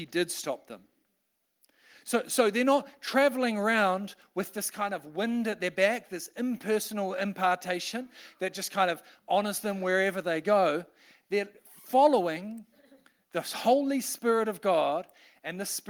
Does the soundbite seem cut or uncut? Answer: uncut